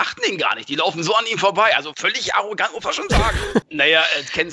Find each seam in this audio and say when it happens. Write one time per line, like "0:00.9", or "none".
0:03.6